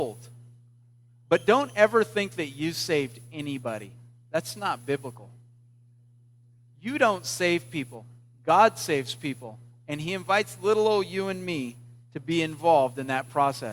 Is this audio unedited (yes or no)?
yes